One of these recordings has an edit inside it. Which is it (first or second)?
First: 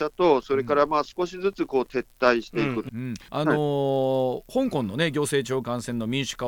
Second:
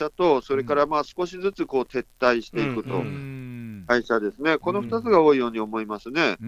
first